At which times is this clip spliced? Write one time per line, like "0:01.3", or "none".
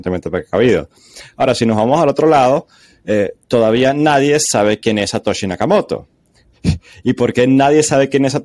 none